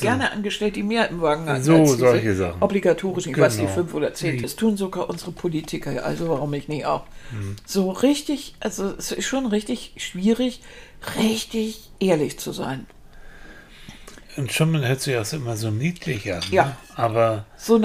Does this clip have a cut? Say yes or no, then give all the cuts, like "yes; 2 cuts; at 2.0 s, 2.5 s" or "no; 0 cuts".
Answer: yes; 1 cut; at 4.4 s